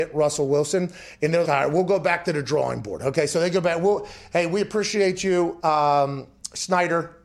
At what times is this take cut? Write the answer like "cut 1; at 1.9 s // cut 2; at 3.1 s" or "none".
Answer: cut 1; at 1.4 s